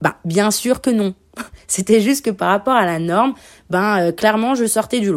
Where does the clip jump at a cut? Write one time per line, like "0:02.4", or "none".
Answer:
none